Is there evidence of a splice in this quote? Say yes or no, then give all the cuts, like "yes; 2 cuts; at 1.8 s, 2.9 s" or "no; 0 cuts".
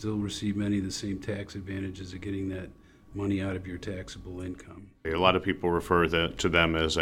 yes; 1 cut; at 5.0 s